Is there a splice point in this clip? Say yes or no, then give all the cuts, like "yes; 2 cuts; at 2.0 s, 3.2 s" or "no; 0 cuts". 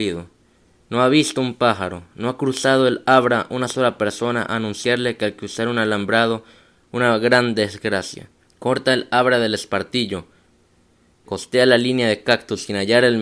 yes; 2 cuts; at 8.5 s, 11.3 s